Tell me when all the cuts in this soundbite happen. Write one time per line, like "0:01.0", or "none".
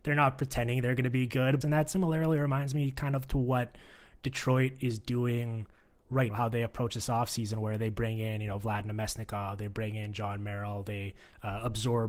0:01.6
0:06.3